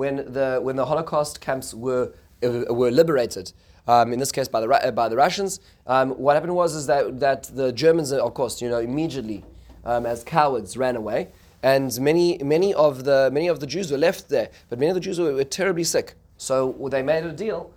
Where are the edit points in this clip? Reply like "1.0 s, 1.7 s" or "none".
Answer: 16.3 s